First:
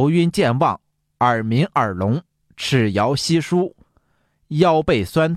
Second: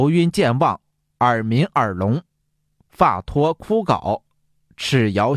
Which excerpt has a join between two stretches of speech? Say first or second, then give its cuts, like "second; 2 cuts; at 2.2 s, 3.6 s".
first; 1 cut; at 2.4 s